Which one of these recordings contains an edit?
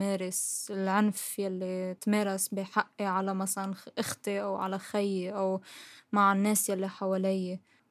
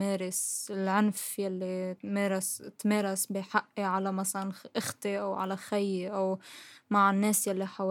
first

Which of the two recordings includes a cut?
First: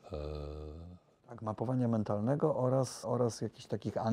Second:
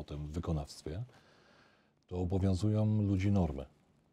first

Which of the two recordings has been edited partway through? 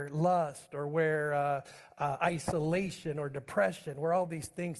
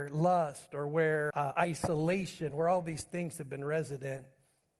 second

